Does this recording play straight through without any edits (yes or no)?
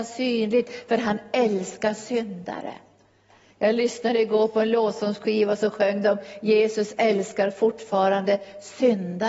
yes